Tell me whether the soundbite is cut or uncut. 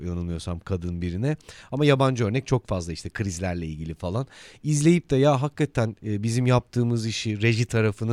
uncut